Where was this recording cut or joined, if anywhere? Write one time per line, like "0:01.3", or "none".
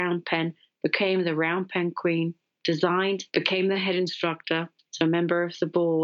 0:03.3
0:04.9